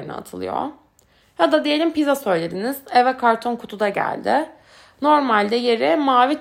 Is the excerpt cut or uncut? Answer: uncut